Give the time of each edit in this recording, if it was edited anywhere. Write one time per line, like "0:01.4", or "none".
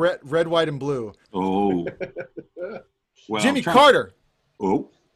0:01.2